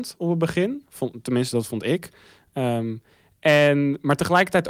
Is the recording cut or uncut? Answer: uncut